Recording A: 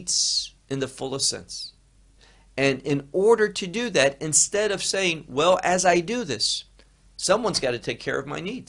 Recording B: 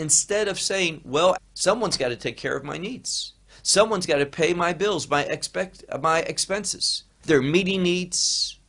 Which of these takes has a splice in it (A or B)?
B